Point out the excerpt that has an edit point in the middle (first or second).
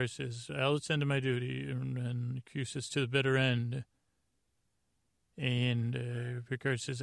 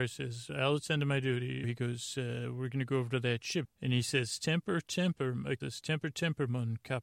second